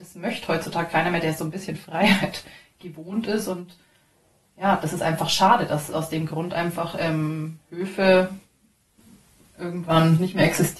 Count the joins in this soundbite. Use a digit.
0